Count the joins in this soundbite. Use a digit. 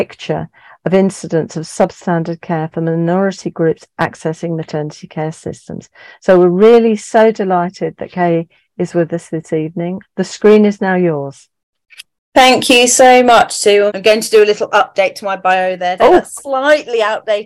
3